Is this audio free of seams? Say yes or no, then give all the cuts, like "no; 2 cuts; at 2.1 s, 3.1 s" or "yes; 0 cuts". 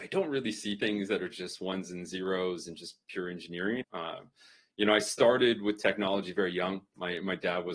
no; 1 cut; at 3.8 s